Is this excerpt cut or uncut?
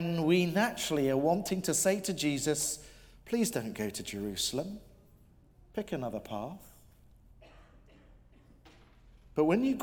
uncut